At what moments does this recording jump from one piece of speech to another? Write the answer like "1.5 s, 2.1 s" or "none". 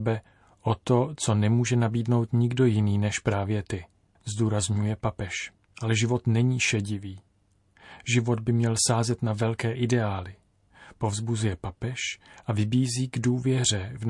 5.7 s